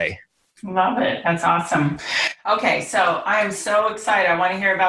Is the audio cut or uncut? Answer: uncut